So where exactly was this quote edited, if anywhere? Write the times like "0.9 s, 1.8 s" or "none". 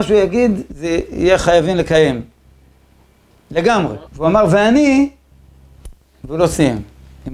4.1 s